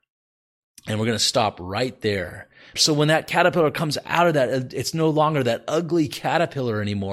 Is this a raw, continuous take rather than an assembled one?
no; 1 cut; at 2.8 s

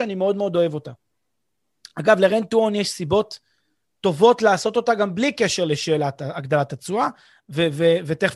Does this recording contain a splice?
no; 0 cuts

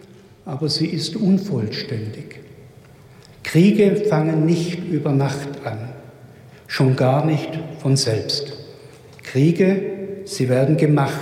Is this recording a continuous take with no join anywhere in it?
yes; 0 cuts

